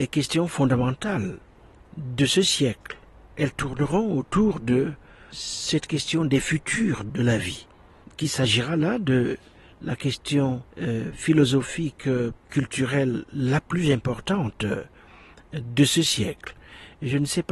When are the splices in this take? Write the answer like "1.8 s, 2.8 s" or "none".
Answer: 10.7 s, 12.4 s